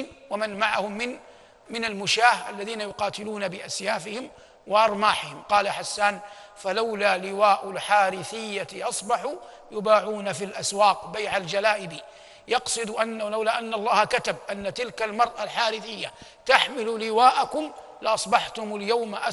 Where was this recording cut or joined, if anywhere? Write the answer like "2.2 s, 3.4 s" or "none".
1.6 s